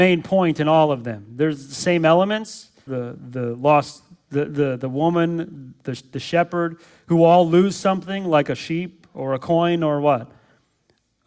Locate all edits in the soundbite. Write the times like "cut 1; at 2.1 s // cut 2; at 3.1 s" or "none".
cut 1; at 2.9 s